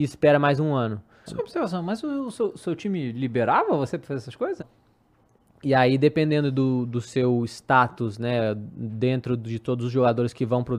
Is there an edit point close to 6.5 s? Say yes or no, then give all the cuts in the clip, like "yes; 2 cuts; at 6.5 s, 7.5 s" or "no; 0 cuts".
no; 2 cuts; at 1.3 s, 4.6 s